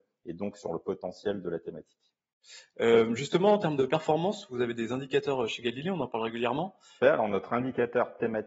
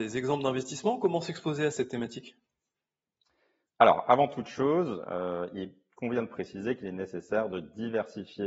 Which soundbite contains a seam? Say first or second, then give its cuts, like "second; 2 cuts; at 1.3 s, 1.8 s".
first; 1 cut; at 7.0 s